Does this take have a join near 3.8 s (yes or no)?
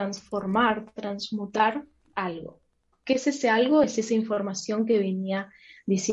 no